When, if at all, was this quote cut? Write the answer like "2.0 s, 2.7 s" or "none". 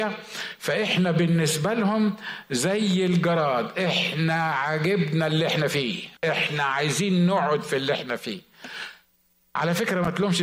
6.2 s